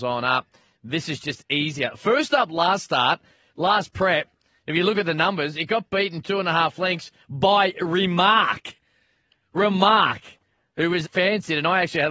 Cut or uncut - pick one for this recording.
cut